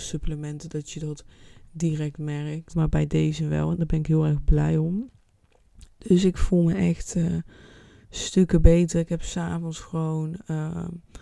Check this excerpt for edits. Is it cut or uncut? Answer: cut